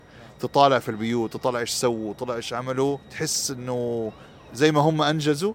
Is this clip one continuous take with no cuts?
no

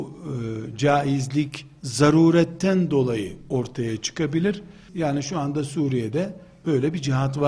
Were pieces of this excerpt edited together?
yes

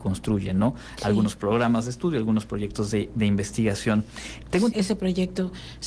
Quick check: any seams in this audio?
yes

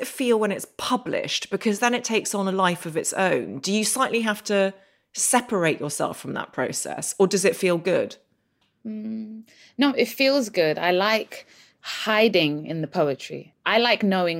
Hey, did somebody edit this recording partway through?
no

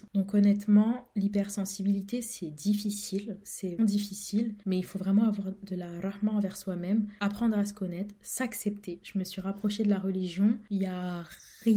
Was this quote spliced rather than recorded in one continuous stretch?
yes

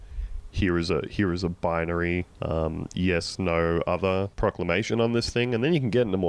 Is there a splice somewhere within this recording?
yes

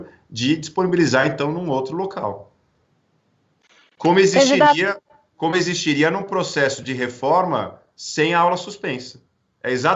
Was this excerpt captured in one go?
yes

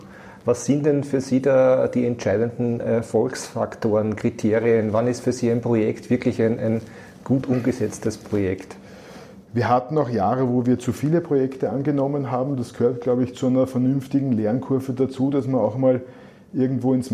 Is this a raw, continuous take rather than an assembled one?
no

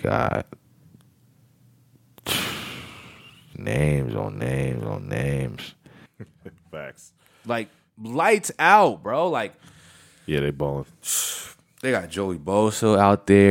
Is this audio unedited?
no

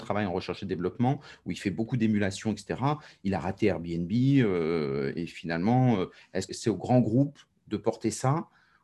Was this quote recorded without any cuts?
no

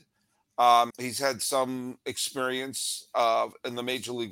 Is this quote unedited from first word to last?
no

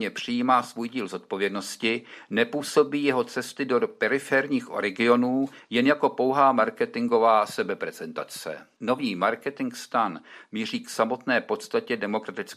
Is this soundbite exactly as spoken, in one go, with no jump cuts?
no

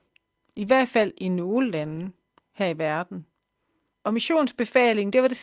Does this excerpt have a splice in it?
yes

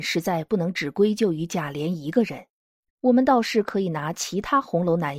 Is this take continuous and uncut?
no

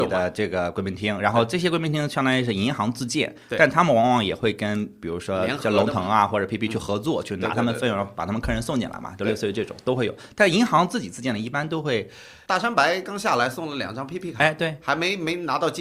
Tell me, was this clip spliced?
yes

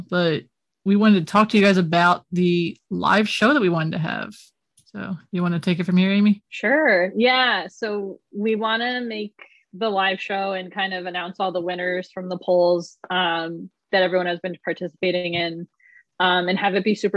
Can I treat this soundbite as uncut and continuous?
yes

